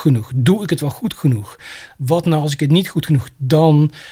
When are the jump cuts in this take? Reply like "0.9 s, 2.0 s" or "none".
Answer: none